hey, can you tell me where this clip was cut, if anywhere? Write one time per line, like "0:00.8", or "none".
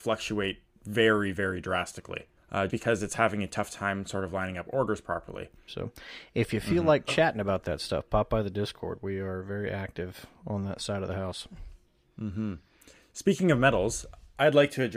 0:02.7
0:05.7